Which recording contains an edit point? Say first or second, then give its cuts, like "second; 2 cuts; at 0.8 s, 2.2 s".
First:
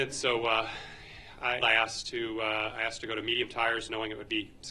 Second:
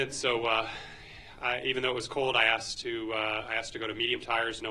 first; 1 cut; at 1.6 s